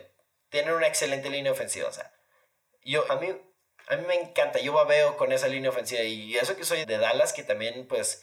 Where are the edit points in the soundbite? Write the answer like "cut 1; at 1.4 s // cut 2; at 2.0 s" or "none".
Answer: cut 1; at 3.1 s // cut 2; at 6.8 s